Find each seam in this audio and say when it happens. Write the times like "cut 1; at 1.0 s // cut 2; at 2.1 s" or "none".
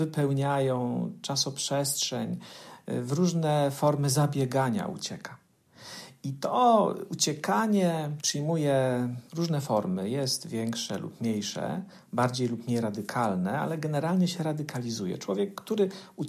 none